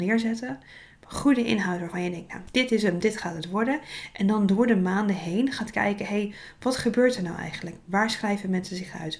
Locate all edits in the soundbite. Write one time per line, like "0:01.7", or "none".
none